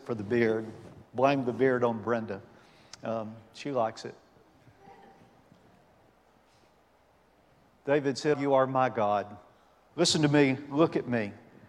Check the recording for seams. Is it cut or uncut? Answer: cut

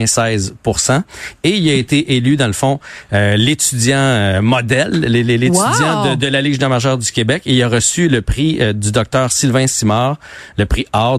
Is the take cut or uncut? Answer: uncut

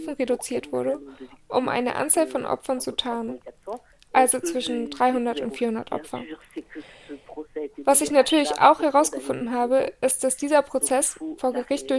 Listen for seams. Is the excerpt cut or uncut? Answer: uncut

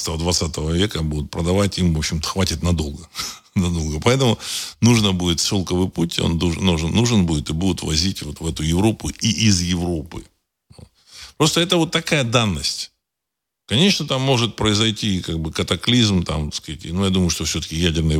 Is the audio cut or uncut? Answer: uncut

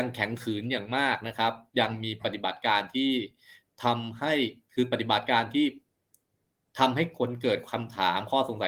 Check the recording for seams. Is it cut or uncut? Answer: uncut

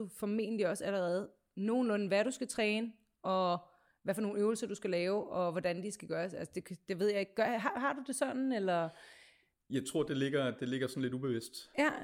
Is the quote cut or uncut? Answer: uncut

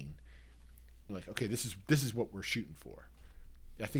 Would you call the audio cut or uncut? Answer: cut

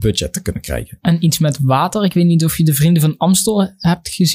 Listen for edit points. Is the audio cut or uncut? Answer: uncut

